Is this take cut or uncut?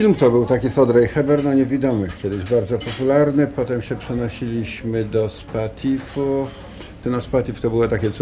cut